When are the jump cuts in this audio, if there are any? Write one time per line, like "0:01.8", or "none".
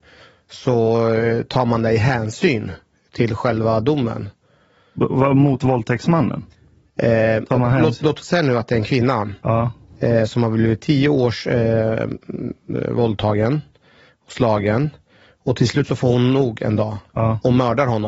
none

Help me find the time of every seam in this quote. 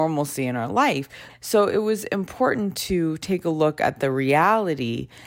0:01.3

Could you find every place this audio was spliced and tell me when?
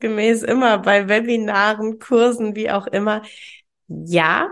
none

